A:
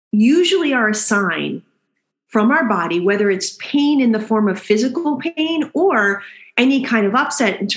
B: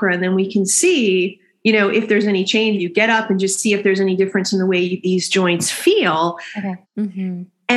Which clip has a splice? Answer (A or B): B